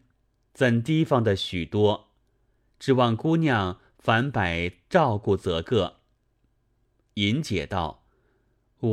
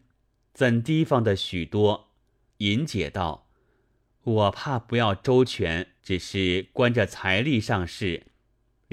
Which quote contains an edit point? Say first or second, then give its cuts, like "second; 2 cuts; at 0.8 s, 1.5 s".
second; 2 cuts; at 2.5 s, 6.0 s